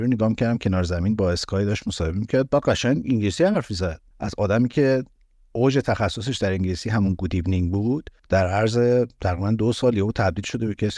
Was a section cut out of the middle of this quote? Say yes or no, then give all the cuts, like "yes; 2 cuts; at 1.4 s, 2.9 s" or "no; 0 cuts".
no; 0 cuts